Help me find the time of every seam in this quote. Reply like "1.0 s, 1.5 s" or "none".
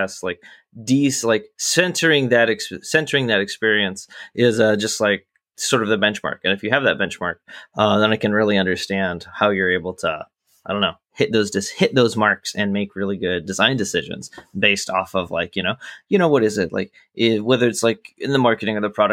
none